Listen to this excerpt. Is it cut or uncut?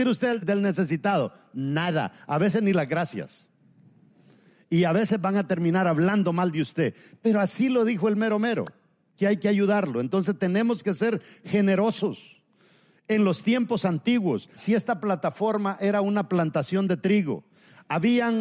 uncut